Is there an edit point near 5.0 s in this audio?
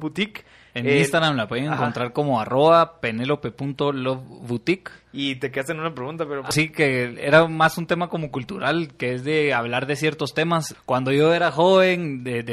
no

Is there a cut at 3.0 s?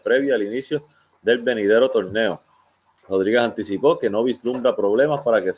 no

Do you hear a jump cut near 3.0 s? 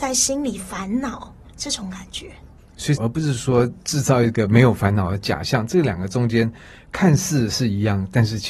yes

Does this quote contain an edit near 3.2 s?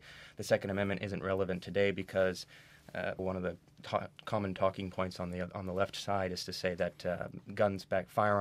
yes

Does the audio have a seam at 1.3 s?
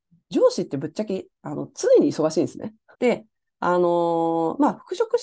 no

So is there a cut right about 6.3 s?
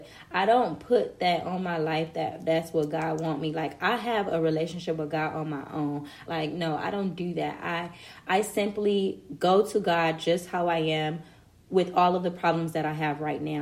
yes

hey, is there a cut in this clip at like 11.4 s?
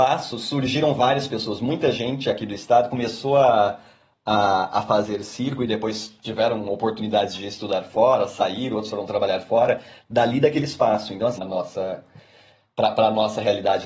yes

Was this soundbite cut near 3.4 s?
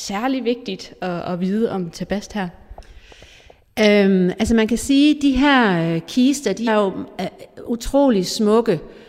no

